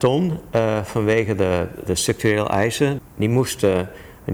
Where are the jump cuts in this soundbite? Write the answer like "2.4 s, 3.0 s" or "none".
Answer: 1.9 s, 3.0 s